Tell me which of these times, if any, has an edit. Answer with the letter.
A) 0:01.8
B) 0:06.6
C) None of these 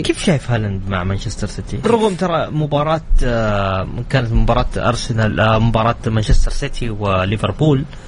A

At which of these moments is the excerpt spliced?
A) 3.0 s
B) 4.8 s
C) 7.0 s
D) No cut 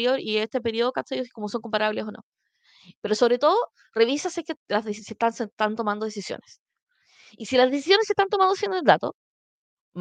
A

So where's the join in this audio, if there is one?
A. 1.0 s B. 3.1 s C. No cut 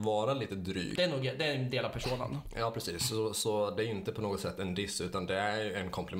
A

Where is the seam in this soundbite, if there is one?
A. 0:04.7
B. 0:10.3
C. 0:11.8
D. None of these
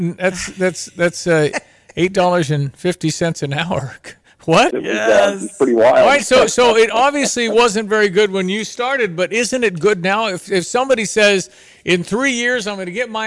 A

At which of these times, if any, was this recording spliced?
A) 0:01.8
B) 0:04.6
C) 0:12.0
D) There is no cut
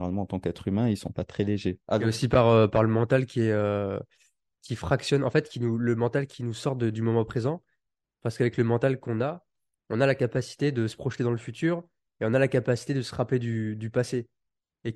A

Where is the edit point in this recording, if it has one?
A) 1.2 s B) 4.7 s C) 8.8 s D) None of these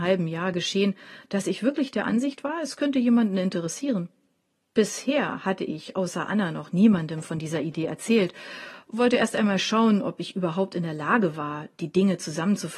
D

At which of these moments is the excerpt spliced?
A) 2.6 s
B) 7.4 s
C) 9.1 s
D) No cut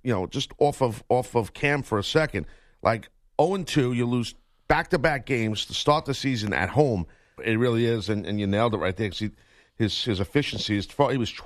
B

